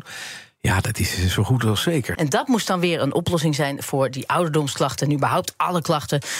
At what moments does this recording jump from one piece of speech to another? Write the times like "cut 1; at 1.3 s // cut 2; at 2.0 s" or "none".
cut 1; at 2.1 s